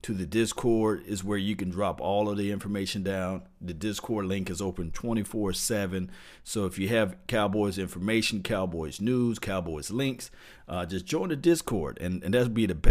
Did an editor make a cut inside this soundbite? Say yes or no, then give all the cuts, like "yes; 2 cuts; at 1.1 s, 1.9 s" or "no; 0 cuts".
no; 0 cuts